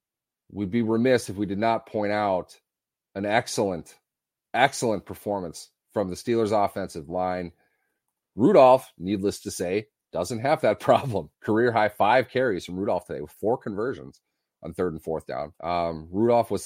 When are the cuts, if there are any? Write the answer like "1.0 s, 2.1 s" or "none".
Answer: 8.2 s, 11.3 s, 15.5 s